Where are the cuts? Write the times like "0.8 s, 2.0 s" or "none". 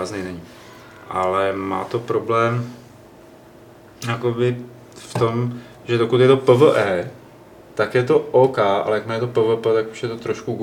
none

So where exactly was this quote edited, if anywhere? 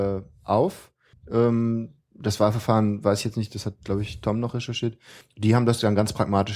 1.1 s, 5.2 s

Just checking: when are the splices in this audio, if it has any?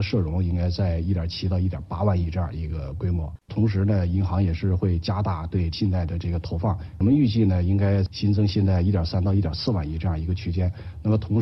3.5 s

